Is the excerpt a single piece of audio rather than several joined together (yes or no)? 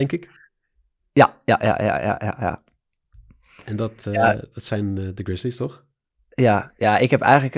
yes